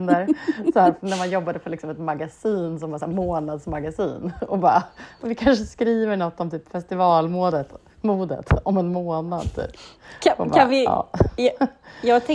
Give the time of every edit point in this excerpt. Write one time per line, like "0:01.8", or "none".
none